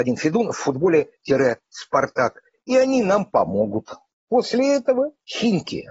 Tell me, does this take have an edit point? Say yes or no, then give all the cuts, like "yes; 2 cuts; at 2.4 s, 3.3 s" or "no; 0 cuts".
no; 0 cuts